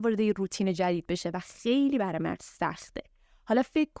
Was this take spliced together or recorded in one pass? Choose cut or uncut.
uncut